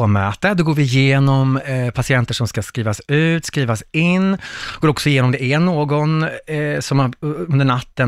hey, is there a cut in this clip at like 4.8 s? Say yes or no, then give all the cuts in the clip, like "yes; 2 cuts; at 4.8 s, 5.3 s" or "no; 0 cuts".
no; 0 cuts